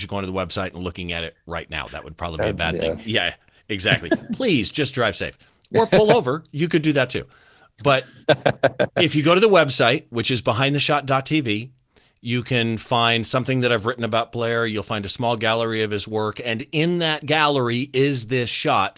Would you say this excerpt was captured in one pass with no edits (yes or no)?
no